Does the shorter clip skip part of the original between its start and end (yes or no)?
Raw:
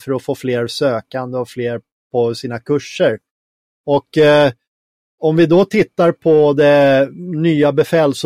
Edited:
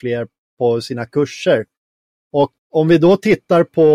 yes